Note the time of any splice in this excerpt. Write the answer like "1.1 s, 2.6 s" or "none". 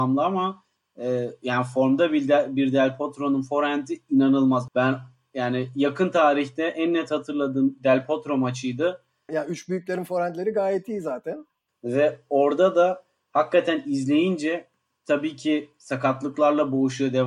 4.7 s, 9.3 s, 11.7 s